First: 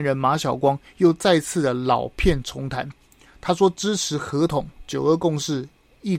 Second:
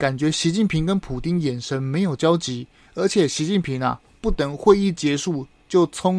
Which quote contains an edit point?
second; 1 cut; at 2.9 s

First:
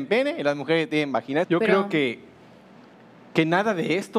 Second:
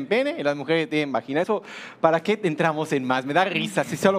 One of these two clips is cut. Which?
first; 1 cut; at 1.4 s

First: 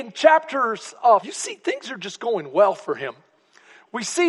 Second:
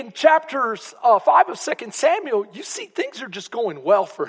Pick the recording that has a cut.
first; 1 cut; at 1.2 s

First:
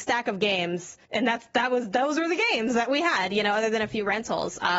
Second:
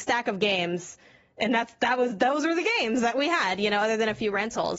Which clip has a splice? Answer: first; 1 cut; at 1.0 s

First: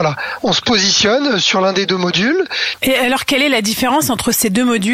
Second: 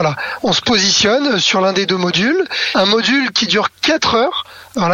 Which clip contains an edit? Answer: first; 1 cut; at 2.7 s

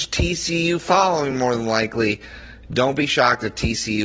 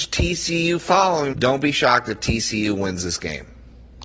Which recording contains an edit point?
second; 1 cut; at 1.3 s

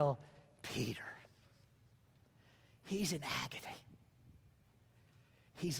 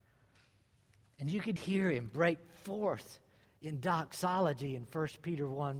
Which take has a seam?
second; 1 cut; at 1.6 s

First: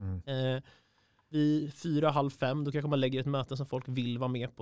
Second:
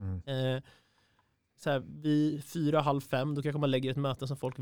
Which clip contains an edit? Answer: first; 1 cut; at 1.3 s

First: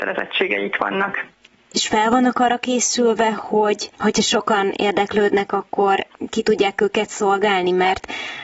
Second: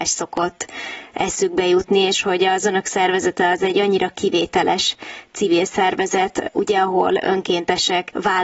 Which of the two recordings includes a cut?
first; 1 cut; at 1.5 s

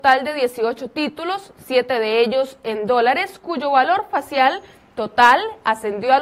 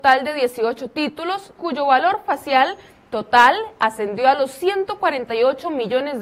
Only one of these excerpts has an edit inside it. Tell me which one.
second; 1 cut; at 1.6 s

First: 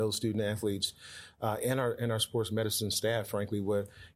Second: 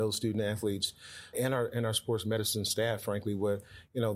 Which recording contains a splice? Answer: second; 1 cut; at 1.3 s

